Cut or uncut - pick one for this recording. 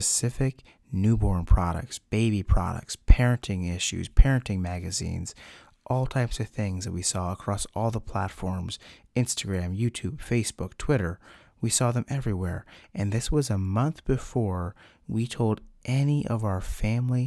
uncut